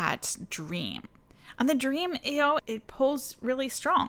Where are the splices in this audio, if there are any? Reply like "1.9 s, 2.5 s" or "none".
2.6 s